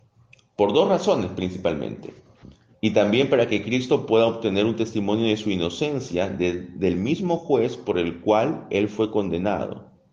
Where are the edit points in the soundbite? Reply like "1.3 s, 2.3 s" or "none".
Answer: 2.7 s